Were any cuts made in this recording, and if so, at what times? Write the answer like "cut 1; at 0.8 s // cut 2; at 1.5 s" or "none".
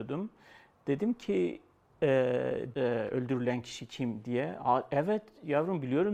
cut 1; at 2.7 s